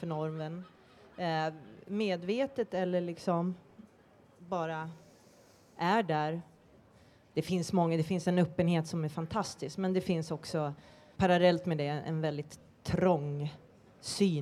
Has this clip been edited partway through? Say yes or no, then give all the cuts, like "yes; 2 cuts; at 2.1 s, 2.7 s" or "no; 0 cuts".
yes; 2 cuts; at 7.3 s, 11.2 s